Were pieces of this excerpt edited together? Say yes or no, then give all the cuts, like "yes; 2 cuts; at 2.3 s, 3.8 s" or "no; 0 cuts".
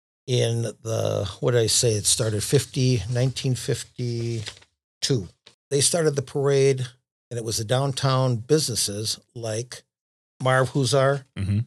no; 0 cuts